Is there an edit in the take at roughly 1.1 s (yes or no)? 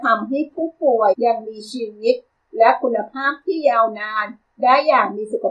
yes